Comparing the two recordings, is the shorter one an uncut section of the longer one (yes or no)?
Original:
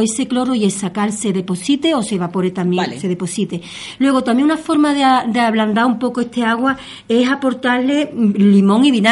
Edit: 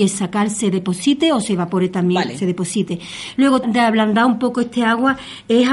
no